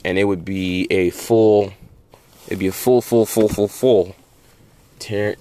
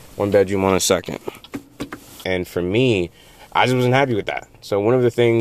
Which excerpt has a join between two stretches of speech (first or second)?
second